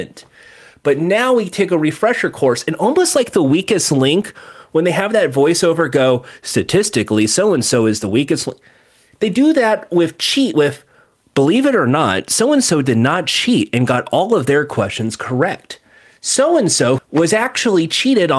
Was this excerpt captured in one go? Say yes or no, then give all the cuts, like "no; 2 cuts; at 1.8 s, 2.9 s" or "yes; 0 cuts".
no; 1 cut; at 17.0 s